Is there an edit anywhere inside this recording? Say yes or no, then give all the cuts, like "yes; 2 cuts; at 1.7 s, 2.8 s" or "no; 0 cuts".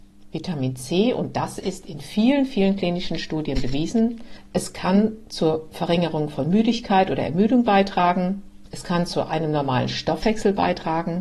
no; 0 cuts